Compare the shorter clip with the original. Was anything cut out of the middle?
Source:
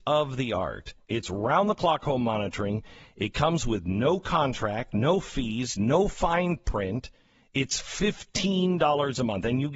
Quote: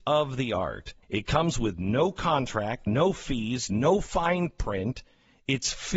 yes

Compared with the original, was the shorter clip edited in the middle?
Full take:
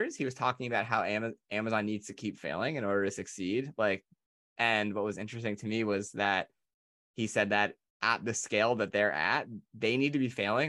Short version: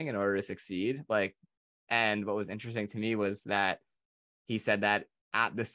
no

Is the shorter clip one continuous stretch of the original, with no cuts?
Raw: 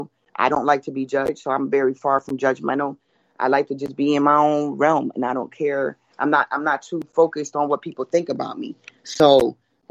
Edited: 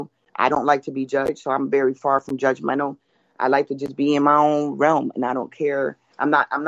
yes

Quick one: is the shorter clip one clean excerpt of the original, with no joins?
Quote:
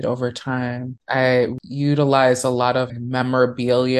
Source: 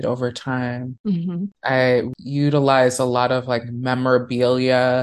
no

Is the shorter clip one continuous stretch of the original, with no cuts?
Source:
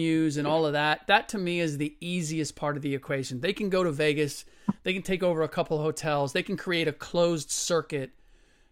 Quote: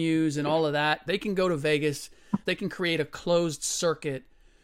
no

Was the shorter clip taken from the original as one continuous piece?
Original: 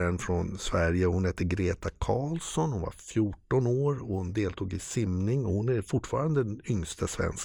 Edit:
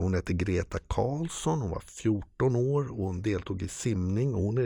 yes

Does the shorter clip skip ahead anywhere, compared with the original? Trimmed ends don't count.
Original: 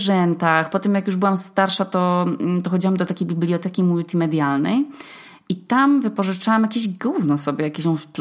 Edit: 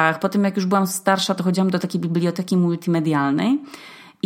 yes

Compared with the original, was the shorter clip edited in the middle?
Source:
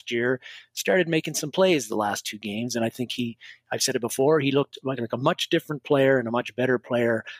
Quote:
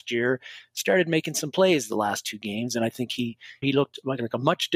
yes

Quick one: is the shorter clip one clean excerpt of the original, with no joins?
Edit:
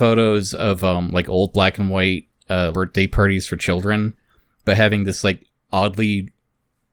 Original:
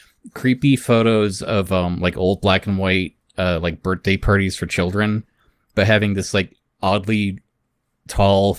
no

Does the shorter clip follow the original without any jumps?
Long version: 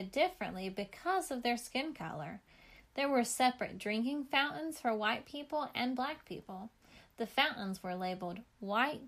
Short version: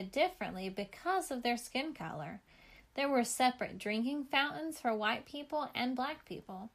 yes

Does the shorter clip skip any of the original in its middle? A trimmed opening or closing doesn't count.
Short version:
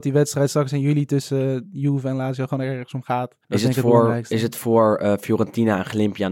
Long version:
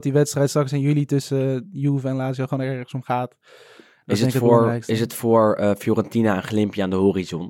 yes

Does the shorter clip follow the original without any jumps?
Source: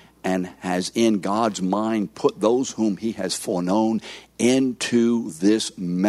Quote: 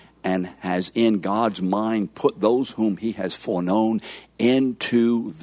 yes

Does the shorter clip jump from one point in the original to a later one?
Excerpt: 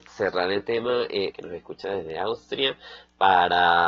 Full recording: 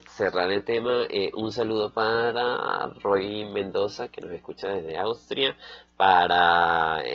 yes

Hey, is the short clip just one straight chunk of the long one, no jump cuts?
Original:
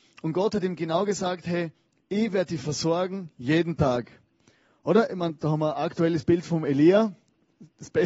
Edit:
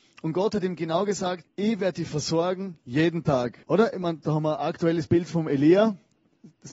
no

